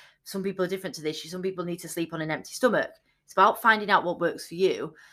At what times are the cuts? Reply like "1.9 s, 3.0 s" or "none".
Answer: none

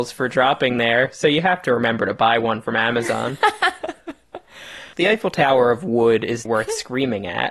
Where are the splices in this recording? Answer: 4.9 s, 6.5 s

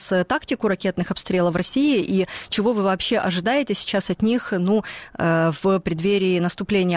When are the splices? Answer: none

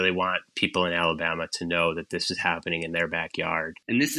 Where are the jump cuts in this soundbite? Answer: none

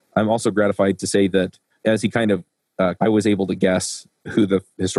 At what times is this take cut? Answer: 1.8 s, 3.0 s

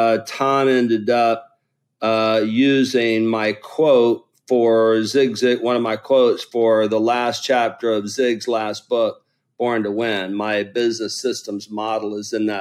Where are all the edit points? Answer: none

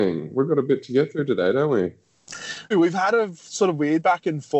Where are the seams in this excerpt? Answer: 2.7 s

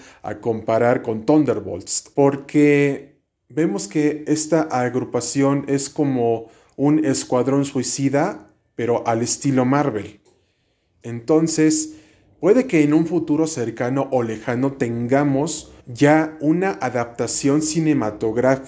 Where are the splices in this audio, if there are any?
2.1 s, 11.0 s, 15.8 s

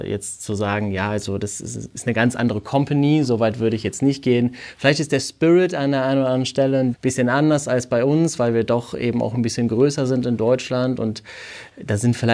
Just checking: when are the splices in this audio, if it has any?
6.9 s

